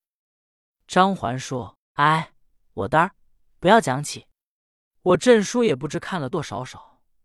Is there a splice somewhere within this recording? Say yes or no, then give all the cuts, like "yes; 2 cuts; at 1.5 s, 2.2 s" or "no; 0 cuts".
yes; 1 cut; at 6.3 s